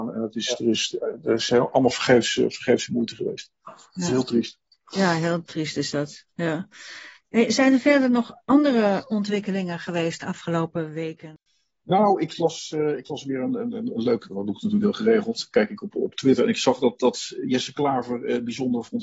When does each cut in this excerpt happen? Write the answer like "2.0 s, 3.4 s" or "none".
none